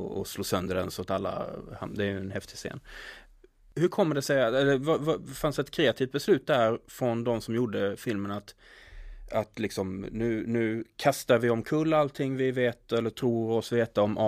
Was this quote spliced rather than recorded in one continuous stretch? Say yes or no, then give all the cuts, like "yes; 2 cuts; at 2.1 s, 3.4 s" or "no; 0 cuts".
no; 0 cuts